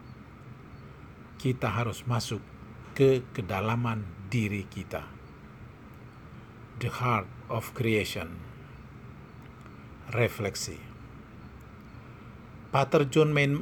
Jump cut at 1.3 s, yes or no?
yes